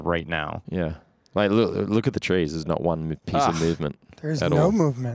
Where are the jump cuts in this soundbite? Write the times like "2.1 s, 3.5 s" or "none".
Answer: none